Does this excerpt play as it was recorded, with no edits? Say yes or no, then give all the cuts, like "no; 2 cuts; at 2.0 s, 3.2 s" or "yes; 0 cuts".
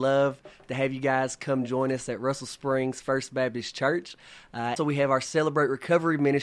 no; 1 cut; at 4.8 s